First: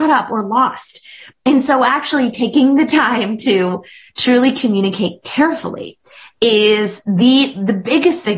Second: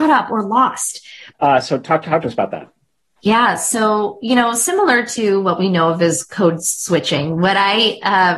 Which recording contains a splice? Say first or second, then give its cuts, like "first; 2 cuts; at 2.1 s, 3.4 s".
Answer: second; 1 cut; at 1.3 s